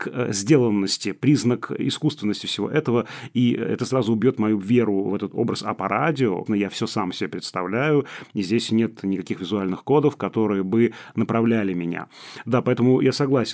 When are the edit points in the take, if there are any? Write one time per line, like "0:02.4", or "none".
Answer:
0:06.5

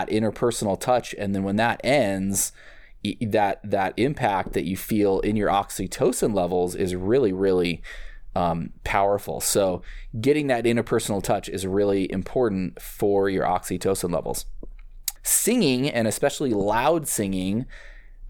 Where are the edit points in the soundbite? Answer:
0:15.2

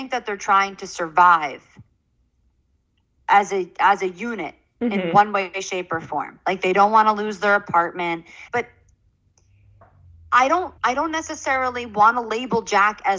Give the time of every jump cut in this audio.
0:08.5
0:10.8

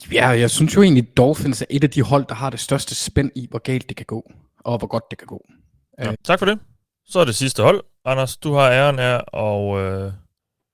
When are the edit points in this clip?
0:06.1

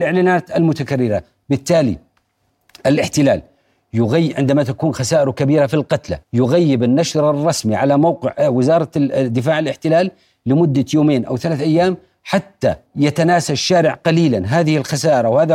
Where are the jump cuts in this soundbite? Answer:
0:06.2
0:12.9

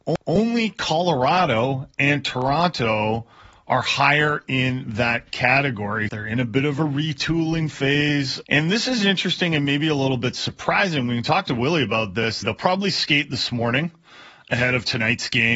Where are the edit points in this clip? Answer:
0:06.1
0:08.4
0:12.4

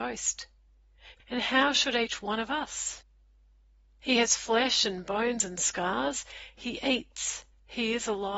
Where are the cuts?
0:01.1
0:04.0

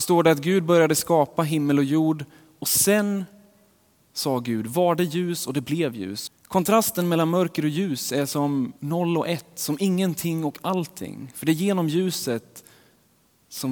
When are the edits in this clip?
0:06.3
0:08.8

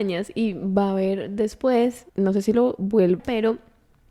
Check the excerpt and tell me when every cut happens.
0:02.1
0:03.2

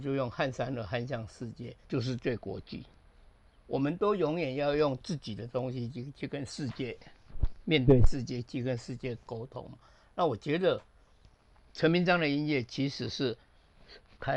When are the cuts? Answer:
0:01.8

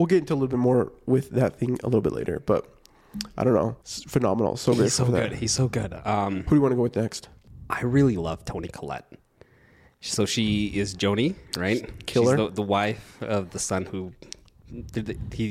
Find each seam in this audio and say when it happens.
0:03.8

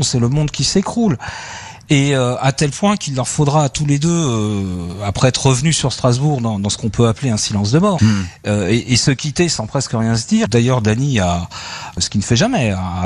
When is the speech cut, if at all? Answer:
0:08.0
0:10.5
0:12.0

